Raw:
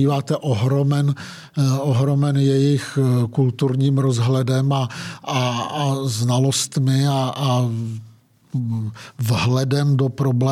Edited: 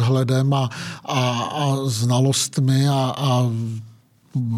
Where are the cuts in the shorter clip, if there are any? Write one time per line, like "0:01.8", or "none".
none